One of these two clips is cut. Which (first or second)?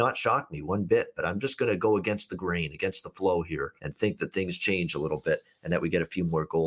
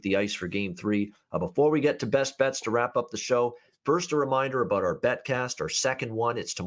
first